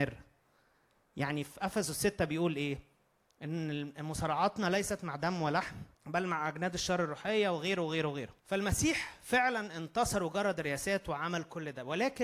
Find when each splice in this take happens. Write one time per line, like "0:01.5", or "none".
0:05.9
0:08.4